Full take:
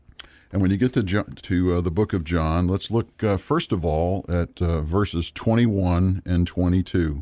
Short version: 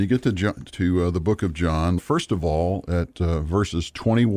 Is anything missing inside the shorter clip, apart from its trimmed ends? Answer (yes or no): yes